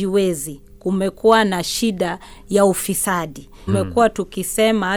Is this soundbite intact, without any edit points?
no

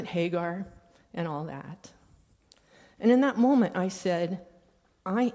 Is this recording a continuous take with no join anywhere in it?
yes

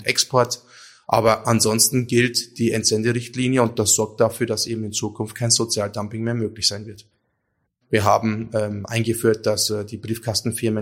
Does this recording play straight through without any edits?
no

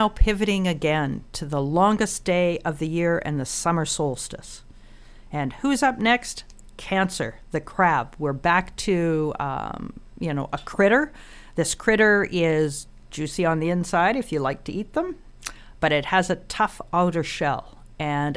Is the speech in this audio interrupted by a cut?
no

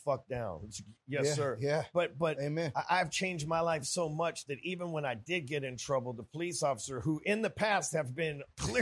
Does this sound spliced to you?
no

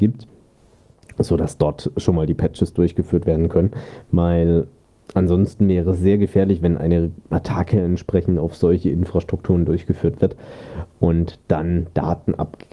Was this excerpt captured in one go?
yes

